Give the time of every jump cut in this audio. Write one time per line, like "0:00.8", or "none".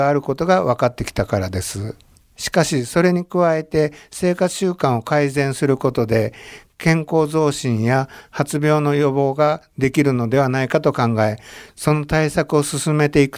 0:02.2